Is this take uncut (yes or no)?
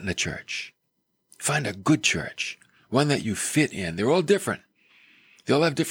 yes